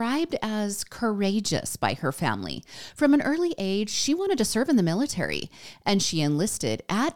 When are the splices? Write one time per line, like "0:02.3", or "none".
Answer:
none